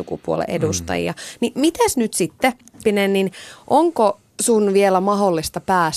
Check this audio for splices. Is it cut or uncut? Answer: cut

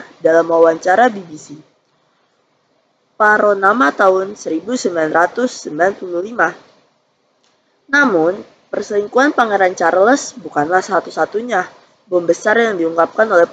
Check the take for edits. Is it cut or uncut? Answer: uncut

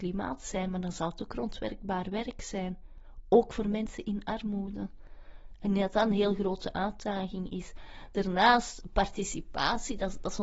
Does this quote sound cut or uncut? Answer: uncut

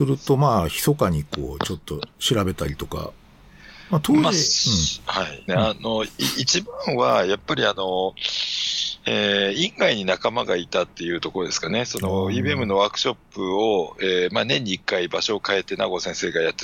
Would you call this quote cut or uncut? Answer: cut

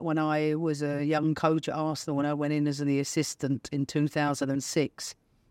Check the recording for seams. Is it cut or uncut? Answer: uncut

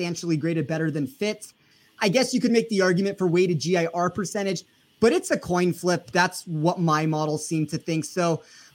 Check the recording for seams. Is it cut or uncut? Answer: cut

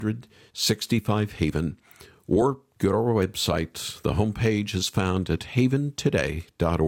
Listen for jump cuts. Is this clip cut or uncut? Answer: uncut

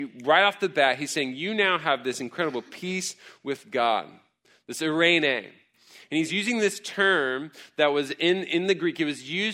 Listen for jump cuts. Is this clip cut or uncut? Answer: uncut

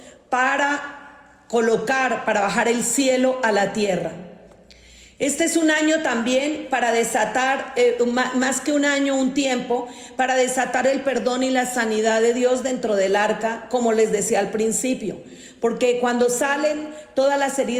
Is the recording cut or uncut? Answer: uncut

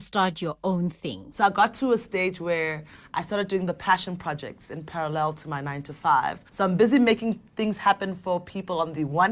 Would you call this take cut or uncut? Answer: uncut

